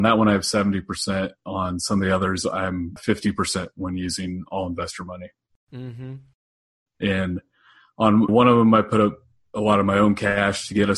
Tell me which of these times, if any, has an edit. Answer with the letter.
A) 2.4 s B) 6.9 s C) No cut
B